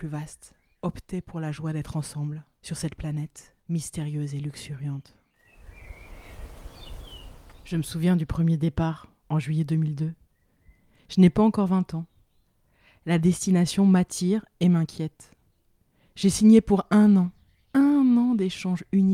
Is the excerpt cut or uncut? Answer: uncut